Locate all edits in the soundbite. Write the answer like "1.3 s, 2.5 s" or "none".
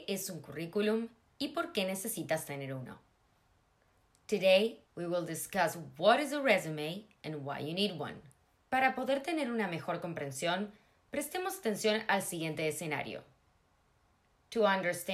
4.9 s, 8.6 s